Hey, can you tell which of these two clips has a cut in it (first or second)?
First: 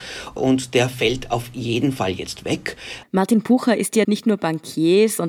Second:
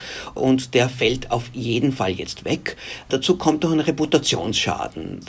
first